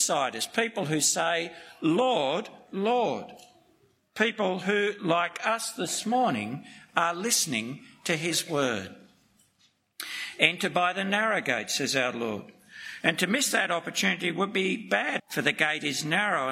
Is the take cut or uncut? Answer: cut